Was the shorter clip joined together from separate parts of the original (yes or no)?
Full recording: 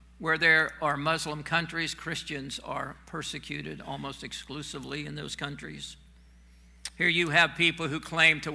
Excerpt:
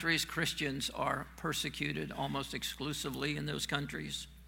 no